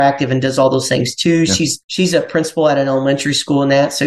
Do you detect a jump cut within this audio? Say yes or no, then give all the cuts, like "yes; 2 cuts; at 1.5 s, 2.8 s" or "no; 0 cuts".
yes; 1 cut; at 1.8 s